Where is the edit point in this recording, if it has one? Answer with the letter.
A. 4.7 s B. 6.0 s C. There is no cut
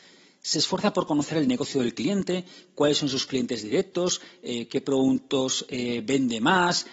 C